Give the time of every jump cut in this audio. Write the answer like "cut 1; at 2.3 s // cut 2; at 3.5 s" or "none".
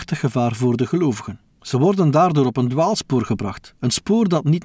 cut 1; at 1.5 s